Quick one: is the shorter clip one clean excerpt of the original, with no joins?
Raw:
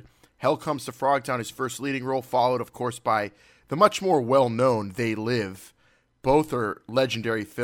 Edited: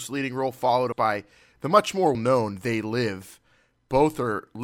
no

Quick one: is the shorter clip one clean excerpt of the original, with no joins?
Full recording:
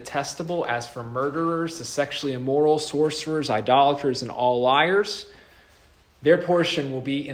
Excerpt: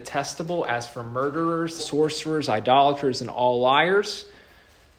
no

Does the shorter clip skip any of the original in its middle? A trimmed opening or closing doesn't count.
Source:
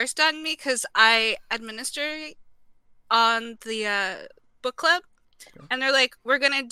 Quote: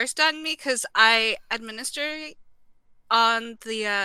no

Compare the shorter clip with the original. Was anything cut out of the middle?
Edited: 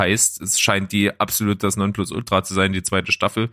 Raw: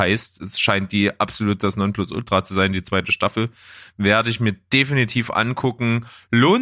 no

